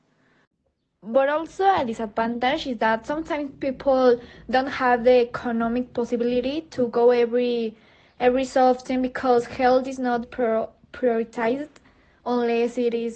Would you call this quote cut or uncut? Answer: cut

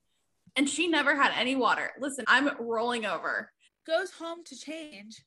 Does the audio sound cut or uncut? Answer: cut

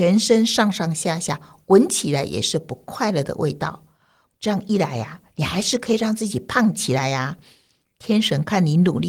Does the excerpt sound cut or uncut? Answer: cut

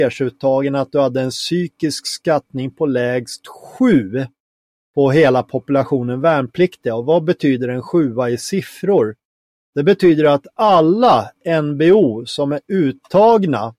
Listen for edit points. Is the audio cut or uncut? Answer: uncut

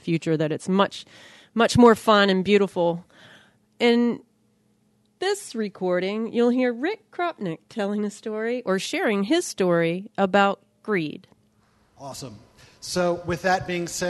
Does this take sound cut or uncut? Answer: uncut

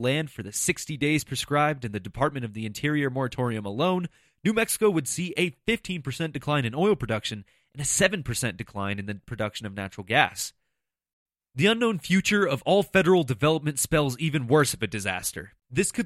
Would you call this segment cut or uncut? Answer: uncut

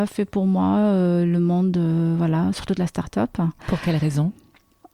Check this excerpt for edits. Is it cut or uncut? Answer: uncut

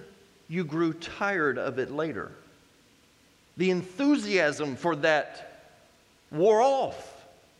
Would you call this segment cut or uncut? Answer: uncut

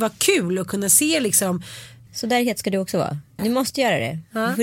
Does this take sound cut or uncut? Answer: cut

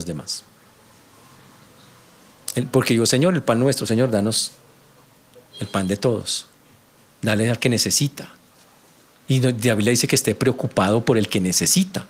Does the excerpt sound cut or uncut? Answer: uncut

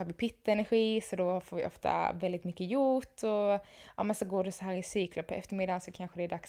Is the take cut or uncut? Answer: uncut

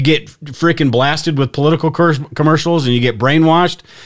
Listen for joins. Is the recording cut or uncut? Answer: uncut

